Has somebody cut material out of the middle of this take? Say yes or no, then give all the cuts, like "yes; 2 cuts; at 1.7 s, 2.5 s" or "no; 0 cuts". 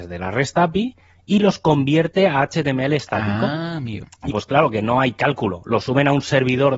yes; 1 cut; at 4.3 s